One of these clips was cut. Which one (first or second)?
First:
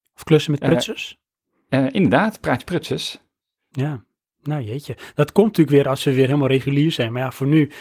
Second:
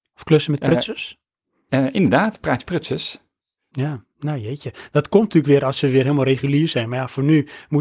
second